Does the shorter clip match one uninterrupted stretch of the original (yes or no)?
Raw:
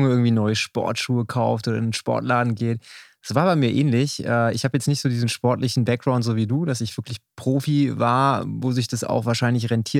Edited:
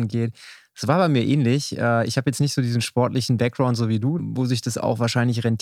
no